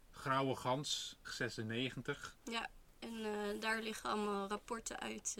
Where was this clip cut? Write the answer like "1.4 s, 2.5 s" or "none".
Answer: 1.2 s, 2.4 s